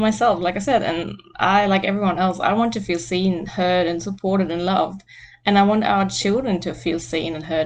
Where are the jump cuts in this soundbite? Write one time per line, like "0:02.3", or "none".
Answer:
none